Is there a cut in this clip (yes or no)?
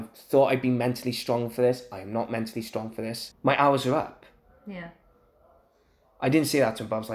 yes